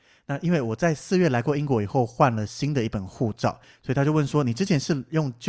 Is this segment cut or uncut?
uncut